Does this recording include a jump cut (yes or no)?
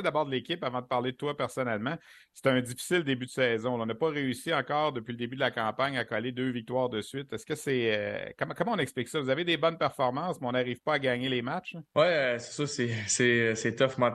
yes